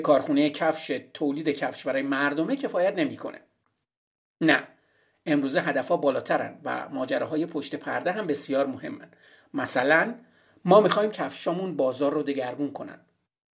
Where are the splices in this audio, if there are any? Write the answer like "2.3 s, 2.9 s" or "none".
none